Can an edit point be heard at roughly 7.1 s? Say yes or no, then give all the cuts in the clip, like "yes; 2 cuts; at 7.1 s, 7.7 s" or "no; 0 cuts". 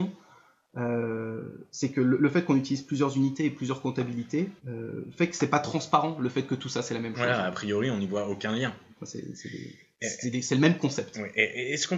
no; 2 cuts; at 4.6 s, 9.0 s